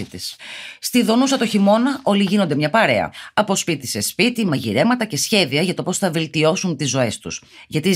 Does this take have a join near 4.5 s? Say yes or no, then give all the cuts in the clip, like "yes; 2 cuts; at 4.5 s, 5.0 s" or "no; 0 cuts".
yes; 1 cut; at 4.5 s